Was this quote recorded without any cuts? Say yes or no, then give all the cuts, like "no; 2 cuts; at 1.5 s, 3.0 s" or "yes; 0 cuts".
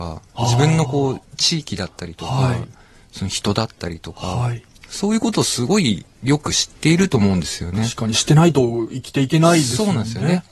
yes; 0 cuts